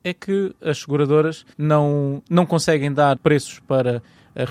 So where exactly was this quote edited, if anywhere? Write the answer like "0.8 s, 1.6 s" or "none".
1.5 s, 3.2 s